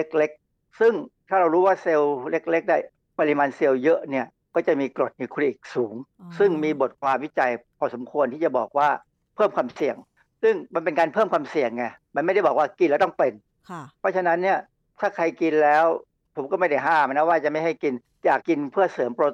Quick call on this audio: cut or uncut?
cut